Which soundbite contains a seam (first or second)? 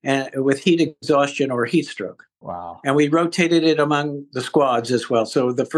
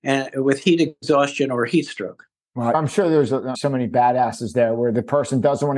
first